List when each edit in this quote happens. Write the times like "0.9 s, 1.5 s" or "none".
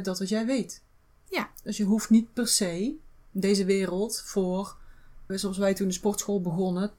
5.3 s